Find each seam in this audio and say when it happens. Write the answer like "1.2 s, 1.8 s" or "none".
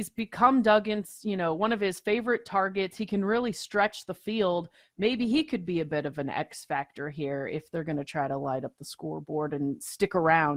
none